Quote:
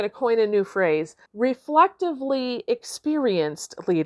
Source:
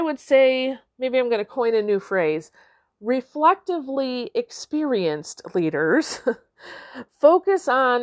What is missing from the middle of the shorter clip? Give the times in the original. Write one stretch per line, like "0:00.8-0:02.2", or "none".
0:02.6-0:02.9